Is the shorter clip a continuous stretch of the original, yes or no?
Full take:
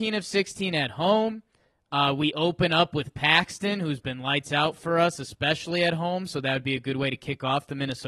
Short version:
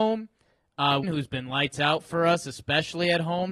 no